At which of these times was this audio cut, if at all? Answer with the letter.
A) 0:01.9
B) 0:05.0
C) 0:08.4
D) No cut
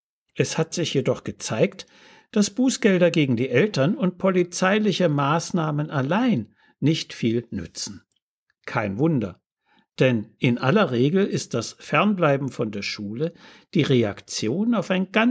D